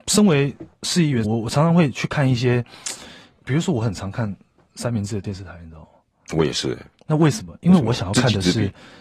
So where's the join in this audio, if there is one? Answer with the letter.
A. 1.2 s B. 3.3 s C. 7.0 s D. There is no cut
A